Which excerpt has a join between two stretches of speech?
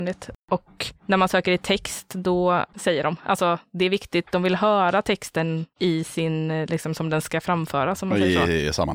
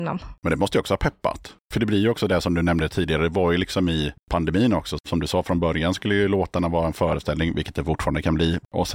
first; 1 cut; at 2.7 s

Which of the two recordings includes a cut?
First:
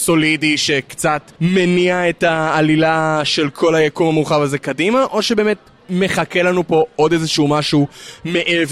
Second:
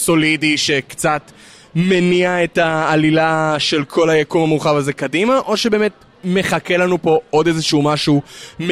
first; 1 cut; at 1.3 s

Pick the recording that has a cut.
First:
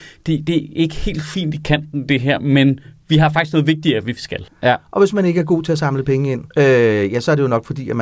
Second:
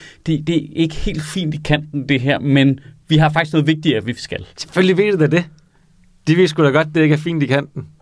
first; 2 cuts; at 4.5 s, 6.5 s

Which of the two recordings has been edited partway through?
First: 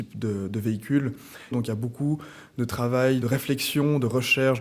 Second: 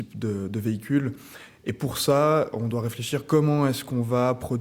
first; 2 cuts; at 1.5 s, 3.2 s

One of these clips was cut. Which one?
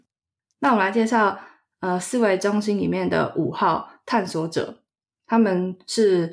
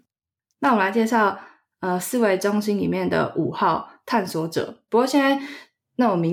second; 1 cut; at 4.9 s

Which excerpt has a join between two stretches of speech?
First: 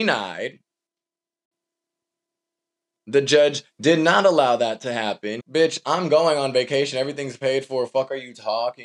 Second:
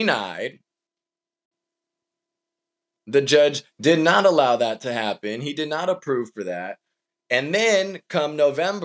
first; 1 cut; at 5.4 s

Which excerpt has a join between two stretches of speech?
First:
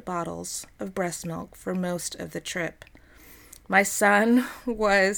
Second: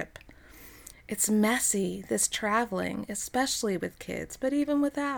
second; 1 cut; at 0.9 s

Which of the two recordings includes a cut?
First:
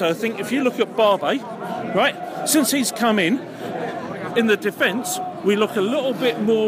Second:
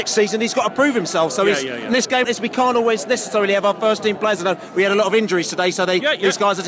second; 1 cut; at 2.2 s

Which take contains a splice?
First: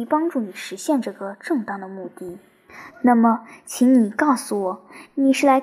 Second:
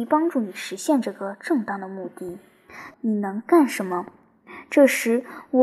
second; 1 cut; at 2.9 s

